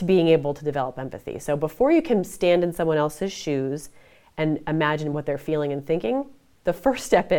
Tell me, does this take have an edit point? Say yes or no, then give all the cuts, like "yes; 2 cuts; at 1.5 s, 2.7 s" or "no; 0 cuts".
no; 0 cuts